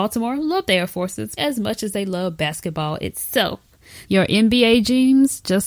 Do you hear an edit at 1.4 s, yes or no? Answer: yes